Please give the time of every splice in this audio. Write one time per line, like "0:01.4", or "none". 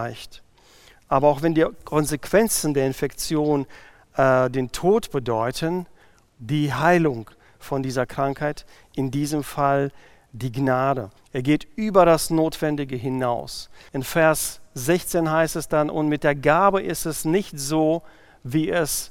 0:06.3
0:11.2
0:13.9